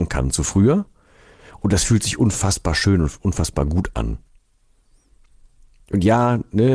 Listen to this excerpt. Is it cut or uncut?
uncut